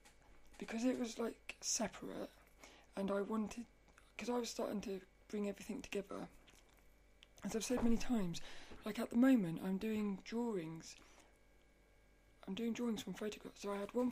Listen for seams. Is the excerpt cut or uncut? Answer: uncut